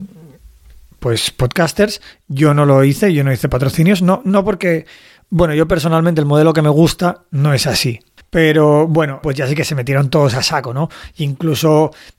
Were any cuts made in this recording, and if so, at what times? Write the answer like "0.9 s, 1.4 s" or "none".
8.2 s, 9.2 s